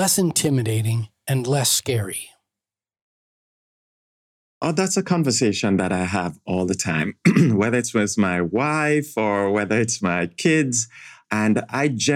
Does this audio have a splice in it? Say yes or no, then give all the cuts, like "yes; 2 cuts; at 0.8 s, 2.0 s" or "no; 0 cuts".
yes; 1 cut; at 11.2 s